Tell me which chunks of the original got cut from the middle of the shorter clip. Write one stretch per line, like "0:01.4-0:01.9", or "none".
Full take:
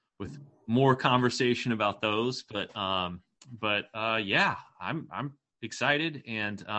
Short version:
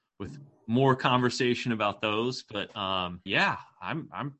0:03.3-0:04.2